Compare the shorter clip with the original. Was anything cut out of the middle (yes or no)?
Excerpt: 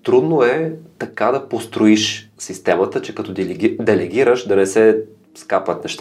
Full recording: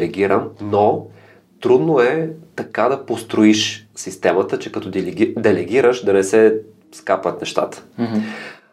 no